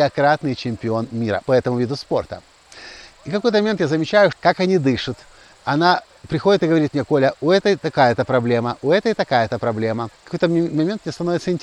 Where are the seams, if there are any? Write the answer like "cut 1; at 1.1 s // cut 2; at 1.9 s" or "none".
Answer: cut 1; at 4.3 s // cut 2; at 10.2 s